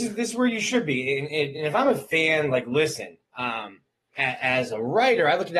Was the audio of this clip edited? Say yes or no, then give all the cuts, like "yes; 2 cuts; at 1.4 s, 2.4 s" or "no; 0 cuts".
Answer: no; 0 cuts